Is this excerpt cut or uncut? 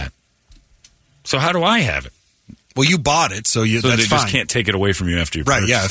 uncut